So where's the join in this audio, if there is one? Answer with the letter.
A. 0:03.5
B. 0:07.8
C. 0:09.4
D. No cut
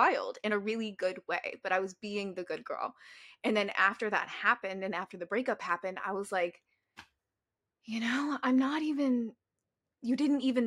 D